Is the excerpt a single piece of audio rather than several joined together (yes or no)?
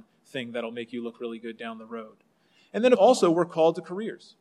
no